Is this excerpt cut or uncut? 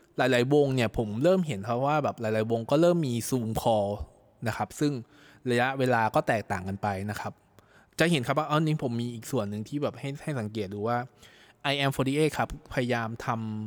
uncut